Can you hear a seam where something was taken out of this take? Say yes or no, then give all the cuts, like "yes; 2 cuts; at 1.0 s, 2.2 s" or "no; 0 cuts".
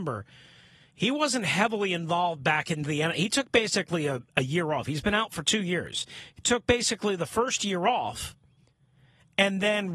no; 0 cuts